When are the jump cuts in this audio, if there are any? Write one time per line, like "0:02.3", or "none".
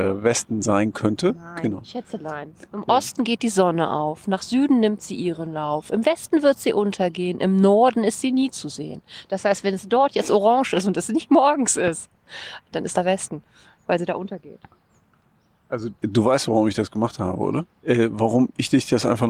0:16.0
0:17.7